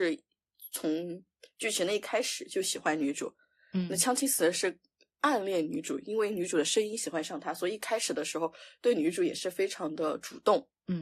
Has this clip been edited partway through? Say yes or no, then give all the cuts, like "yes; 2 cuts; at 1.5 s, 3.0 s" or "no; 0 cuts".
no; 0 cuts